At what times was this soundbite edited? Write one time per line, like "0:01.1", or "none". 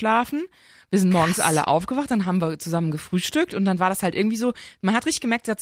none